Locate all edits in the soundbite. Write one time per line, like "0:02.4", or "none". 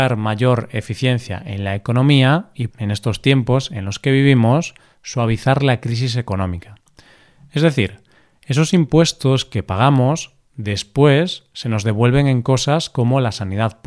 0:02.7